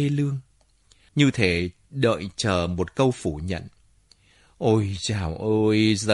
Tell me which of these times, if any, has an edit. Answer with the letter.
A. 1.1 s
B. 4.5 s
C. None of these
A